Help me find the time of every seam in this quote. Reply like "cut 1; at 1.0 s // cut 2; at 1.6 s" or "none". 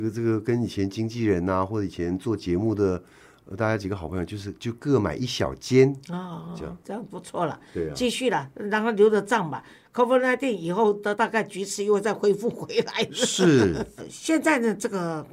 cut 1; at 11.1 s // cut 2; at 14.0 s